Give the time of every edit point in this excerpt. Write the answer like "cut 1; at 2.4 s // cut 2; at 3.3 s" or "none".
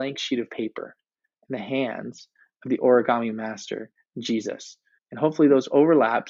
cut 1; at 4.9 s